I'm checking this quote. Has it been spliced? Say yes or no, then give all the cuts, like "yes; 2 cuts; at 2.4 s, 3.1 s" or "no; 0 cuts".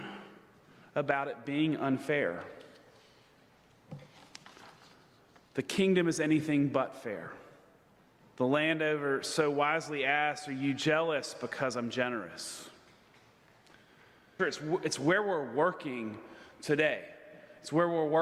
yes; 2 cuts; at 8.2 s, 14.4 s